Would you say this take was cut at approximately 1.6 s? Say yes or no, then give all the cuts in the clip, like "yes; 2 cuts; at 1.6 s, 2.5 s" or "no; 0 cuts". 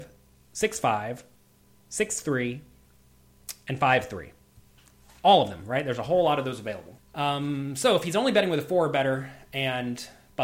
no; 1 cut; at 7.0 s